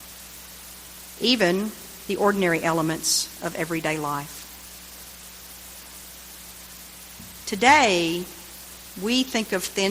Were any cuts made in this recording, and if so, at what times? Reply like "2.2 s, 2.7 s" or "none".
2.1 s, 7.4 s